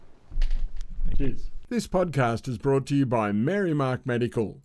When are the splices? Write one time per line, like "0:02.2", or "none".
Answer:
none

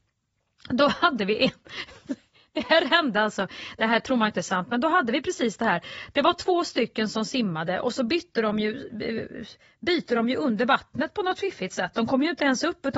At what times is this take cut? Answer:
none

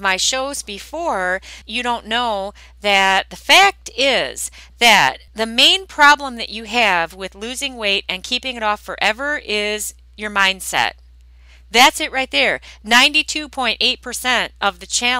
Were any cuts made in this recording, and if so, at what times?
0:01.6
0:05.3

